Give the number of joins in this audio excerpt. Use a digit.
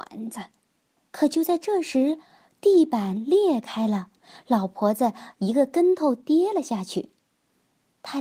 1